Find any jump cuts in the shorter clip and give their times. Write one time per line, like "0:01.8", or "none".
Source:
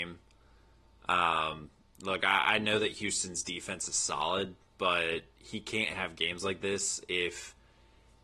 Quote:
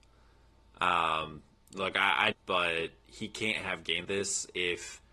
0:02.3
0:04.0